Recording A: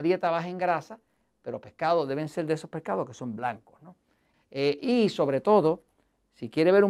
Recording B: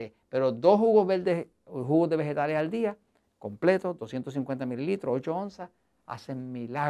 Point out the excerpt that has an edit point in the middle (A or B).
A